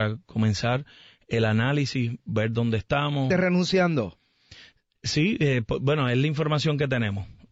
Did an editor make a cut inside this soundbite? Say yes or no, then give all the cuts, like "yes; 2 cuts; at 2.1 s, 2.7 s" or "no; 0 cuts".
yes; 1 cut; at 3.3 s